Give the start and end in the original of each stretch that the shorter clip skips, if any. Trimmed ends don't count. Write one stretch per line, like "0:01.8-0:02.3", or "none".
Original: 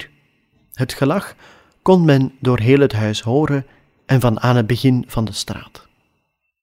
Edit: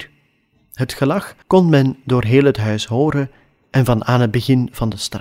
0:01.4-0:01.8